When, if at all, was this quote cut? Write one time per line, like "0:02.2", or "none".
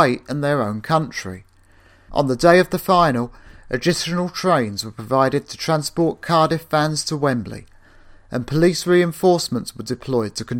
0:02.1